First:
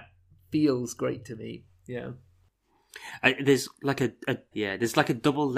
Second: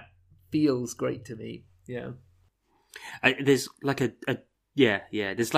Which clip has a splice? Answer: first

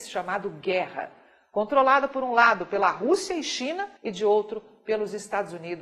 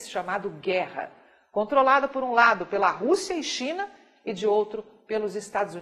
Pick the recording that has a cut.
first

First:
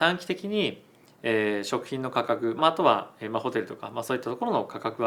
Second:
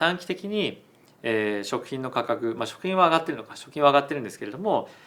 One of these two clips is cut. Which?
first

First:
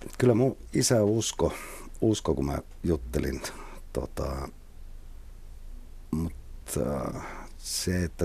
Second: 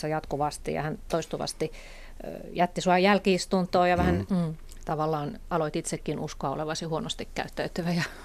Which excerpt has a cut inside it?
second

